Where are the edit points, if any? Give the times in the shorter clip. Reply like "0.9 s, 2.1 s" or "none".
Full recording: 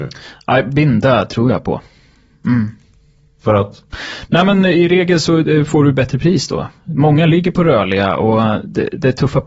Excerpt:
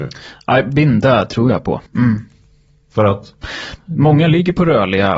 1.9 s, 3.8 s